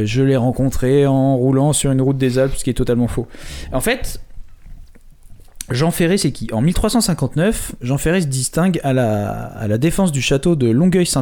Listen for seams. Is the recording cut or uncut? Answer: uncut